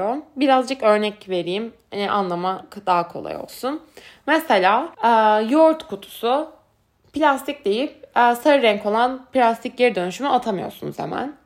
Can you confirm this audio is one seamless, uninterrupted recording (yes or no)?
no